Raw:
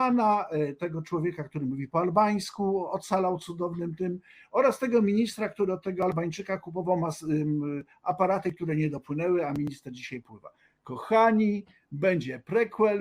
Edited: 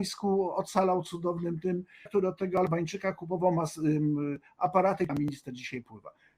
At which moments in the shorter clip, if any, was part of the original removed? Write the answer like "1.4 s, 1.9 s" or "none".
2.1 s, 5.1 s